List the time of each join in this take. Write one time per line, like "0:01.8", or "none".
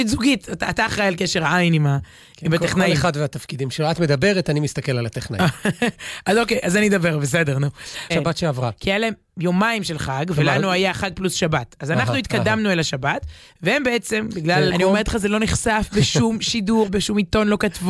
0:08.1
0:14.7
0:16.9